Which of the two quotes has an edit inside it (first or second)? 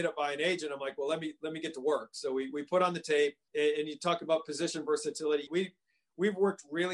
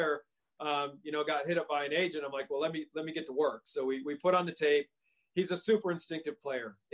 first